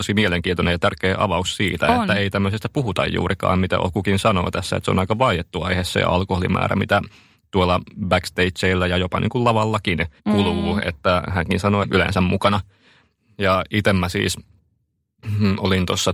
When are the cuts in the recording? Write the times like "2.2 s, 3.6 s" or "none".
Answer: 10.2 s, 11.8 s